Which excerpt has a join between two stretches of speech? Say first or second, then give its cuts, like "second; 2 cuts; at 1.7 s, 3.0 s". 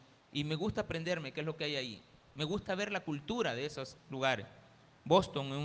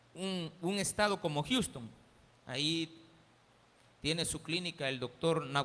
second; 1 cut; at 2.3 s